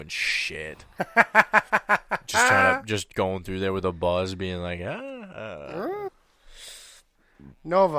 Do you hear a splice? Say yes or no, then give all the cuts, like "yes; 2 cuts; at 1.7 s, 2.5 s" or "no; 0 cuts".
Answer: yes; 1 cut; at 6.1 s